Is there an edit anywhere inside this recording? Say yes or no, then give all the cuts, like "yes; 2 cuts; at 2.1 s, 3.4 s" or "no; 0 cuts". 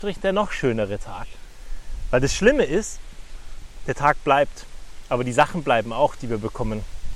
no; 0 cuts